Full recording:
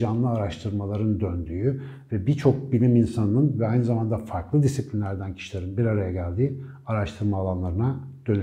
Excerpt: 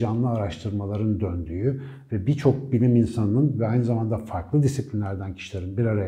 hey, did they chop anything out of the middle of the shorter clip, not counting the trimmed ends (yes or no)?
no